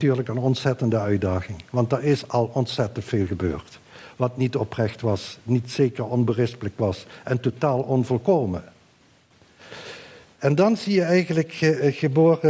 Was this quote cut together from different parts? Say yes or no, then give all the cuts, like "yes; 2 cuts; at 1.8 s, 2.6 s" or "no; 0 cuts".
no; 0 cuts